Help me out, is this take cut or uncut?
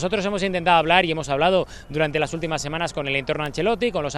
uncut